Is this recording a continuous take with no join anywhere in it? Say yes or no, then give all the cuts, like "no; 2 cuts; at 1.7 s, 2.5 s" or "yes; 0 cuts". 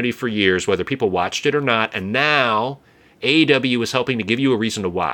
yes; 0 cuts